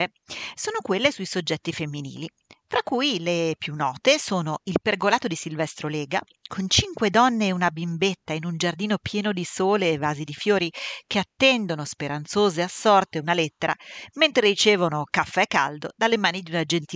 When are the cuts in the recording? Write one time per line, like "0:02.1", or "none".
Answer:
none